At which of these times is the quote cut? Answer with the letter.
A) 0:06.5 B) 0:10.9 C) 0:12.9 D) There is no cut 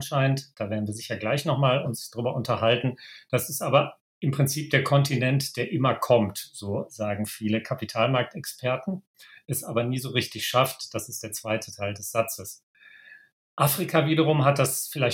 D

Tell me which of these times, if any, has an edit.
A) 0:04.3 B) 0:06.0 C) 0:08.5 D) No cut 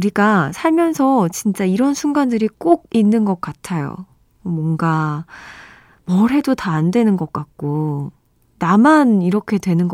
D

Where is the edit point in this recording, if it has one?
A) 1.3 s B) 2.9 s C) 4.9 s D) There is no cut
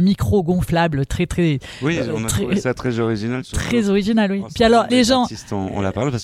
C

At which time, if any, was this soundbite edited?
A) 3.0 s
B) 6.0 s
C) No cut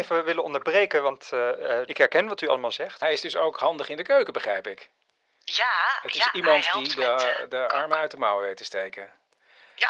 A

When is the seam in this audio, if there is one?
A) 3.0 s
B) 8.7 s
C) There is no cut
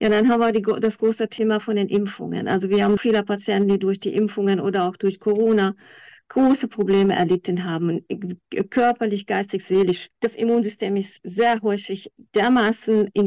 A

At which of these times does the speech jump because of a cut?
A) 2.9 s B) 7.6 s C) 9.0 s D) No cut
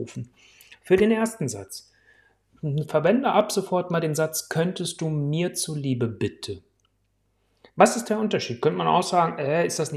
D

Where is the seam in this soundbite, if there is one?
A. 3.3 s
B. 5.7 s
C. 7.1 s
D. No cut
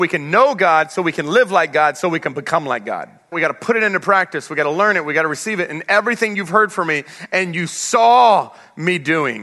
A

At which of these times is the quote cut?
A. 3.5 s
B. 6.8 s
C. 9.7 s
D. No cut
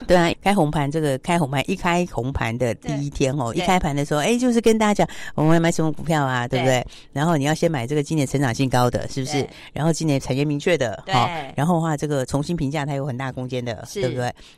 A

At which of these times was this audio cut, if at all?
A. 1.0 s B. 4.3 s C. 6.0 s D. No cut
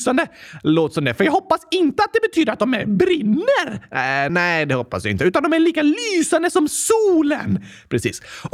B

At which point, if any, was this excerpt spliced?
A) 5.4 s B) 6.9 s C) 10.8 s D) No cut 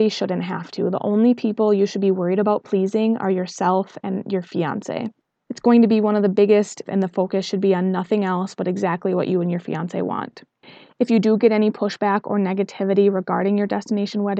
B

